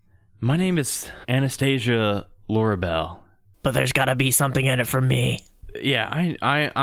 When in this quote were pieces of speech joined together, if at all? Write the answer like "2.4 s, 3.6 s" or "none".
3.5 s